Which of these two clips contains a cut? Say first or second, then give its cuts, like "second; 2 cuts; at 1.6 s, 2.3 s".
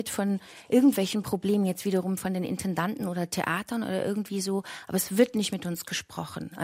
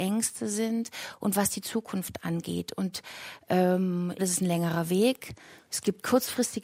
second; 1 cut; at 4.2 s